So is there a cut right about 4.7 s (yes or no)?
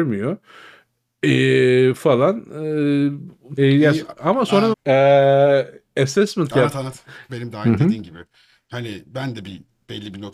yes